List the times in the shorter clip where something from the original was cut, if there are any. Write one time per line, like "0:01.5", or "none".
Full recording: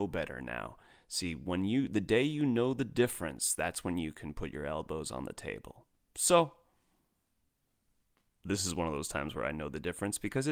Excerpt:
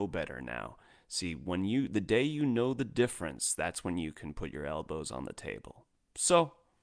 none